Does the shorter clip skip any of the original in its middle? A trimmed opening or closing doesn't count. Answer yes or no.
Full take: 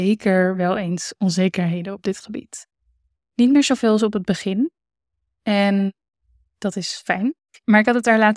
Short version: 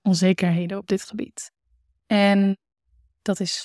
yes